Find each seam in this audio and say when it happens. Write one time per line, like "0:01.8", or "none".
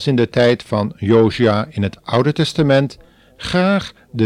none